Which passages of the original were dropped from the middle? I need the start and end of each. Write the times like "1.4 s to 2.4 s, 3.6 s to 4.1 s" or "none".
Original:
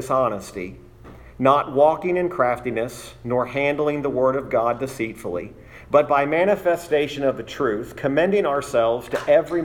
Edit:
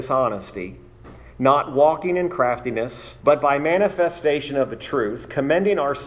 3.2 s to 5.9 s